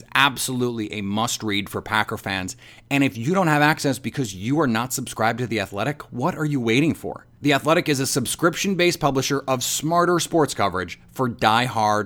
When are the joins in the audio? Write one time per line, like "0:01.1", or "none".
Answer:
none